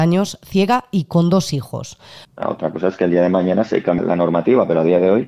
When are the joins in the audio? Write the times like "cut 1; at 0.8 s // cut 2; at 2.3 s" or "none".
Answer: cut 1; at 2.2 s // cut 2; at 4.0 s